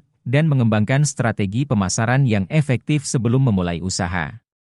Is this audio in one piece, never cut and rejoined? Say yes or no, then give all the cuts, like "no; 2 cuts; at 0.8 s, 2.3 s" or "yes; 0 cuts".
yes; 0 cuts